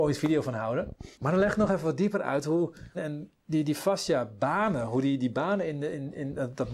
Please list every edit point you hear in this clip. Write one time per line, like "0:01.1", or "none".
0:01.1
0:02.9